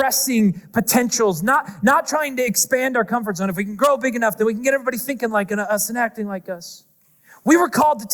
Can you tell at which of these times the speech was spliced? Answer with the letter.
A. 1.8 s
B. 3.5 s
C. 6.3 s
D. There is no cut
A